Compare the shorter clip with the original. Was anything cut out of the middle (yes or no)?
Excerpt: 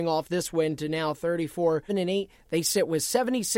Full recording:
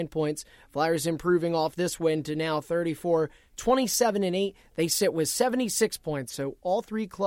yes